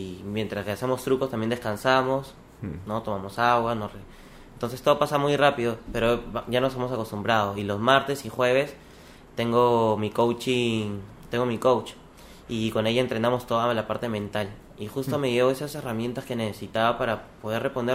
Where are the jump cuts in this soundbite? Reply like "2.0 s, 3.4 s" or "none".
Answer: none